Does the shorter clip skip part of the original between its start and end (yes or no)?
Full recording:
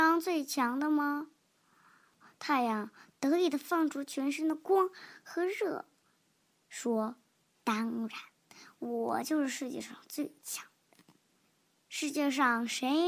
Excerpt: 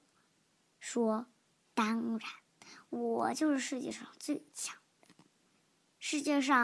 no